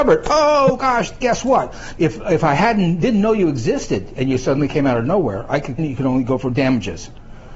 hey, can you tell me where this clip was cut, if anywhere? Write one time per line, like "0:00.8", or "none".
0:02.0
0:05.8